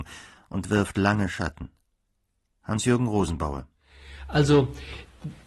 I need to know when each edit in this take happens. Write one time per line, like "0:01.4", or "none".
none